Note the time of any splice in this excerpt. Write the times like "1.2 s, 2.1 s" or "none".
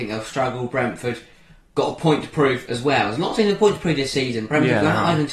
none